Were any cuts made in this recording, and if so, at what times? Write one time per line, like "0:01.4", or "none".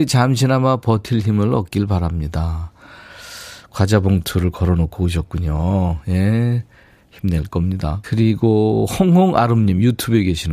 0:08.0